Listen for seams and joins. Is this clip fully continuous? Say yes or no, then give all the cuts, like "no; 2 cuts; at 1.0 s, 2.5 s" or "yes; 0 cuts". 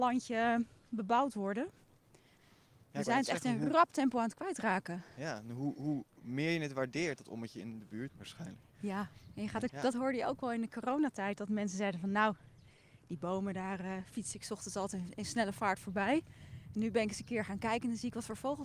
no; 2 cuts; at 8.1 s, 9.7 s